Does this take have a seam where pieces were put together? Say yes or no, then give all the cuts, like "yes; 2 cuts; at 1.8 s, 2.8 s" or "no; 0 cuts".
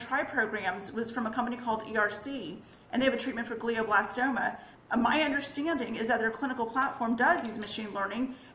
no; 0 cuts